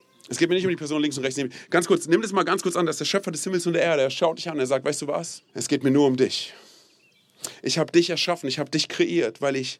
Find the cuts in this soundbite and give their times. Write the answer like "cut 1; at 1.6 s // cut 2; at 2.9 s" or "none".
cut 1; at 5.5 s